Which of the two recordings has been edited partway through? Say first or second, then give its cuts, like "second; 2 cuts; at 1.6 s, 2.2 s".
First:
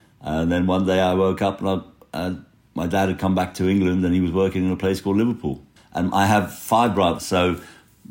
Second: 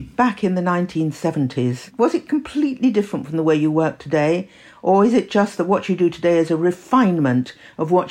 first; 2 cuts; at 5.8 s, 7.2 s